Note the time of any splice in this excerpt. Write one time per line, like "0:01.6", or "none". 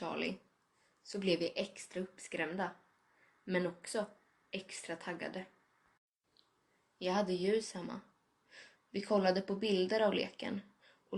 0:08.7